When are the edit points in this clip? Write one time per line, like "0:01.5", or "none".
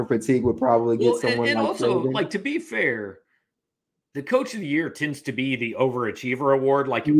none